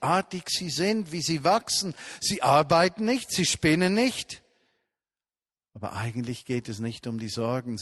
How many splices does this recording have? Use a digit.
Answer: 1